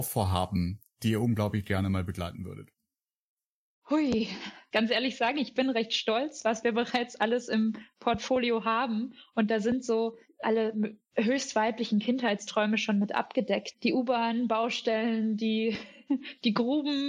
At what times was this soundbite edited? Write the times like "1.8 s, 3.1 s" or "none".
4.7 s